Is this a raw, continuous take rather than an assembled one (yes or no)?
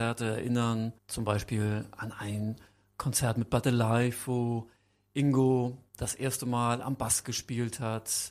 no